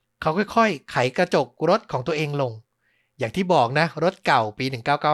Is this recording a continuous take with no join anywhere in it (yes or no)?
yes